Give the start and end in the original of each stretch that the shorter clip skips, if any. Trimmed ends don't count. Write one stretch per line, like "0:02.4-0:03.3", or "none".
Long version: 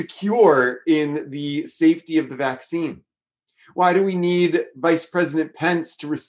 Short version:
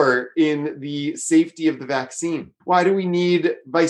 0:03.1-0:03.7